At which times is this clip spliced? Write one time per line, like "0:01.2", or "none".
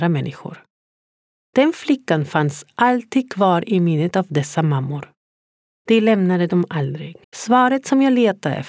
0:07.2